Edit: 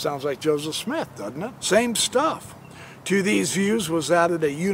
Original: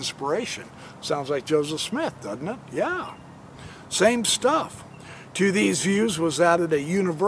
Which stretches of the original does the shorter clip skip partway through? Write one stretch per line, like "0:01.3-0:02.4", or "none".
0:02.6-0:03.9